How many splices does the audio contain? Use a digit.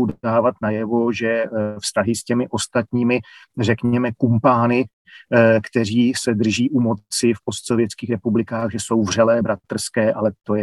0